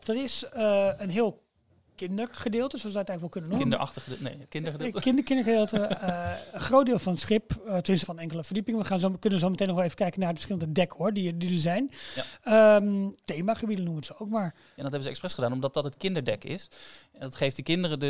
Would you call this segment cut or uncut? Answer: cut